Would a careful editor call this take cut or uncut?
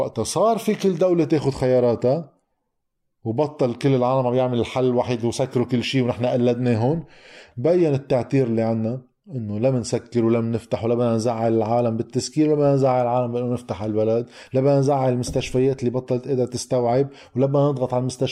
cut